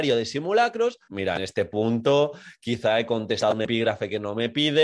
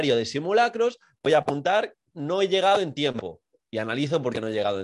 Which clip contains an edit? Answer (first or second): first